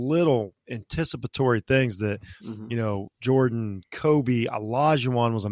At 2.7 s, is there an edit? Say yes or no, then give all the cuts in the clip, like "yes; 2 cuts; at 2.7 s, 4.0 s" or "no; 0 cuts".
no; 0 cuts